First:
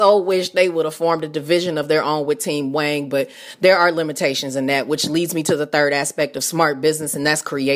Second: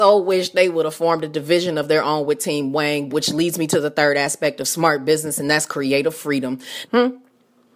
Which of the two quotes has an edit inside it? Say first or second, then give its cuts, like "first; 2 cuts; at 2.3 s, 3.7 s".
second; 2 cuts; at 3.1 s, 6.9 s